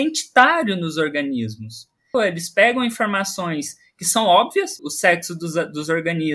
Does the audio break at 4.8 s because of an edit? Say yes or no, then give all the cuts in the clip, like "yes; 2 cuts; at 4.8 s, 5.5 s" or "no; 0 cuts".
yes; 2 cuts; at 2.1 s, 4.8 s